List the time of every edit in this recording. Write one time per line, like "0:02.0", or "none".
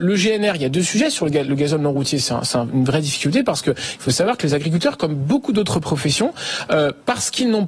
none